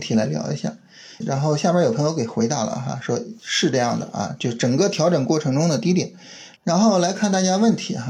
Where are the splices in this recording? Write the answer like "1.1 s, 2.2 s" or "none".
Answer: 1.2 s, 6.6 s